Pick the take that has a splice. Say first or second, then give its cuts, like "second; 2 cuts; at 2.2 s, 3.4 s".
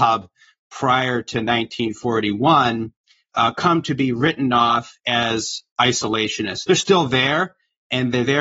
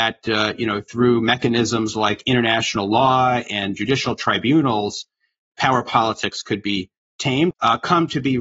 second; 1 cut; at 7.5 s